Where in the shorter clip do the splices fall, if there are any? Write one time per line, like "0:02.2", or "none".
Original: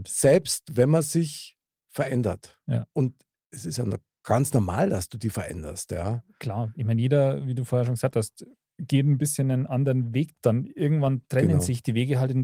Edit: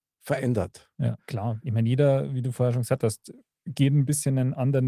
0:01.2